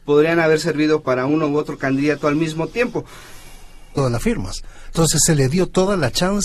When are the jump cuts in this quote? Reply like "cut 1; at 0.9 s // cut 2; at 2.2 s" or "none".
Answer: cut 1; at 4.0 s